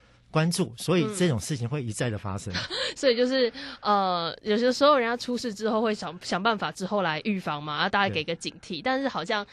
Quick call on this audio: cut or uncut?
uncut